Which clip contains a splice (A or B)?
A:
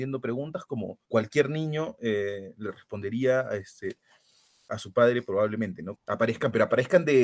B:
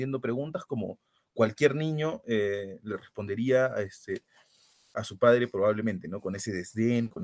A